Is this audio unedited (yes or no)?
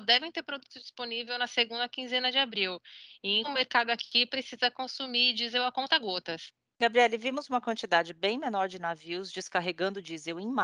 no